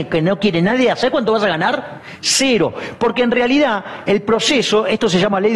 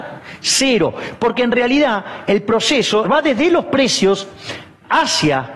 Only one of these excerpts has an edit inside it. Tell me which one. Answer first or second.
second